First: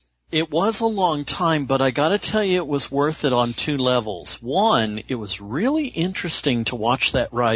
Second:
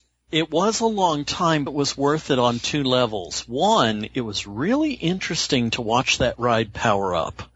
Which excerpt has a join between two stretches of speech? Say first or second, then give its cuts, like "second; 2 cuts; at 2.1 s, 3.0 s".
second; 1 cut; at 1.7 s